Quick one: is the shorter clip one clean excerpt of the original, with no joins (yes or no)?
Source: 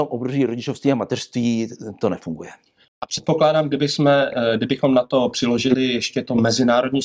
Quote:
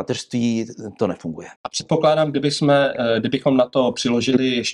no